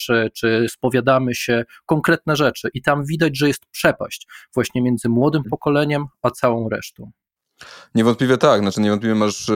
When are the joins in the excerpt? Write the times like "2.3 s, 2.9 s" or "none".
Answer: none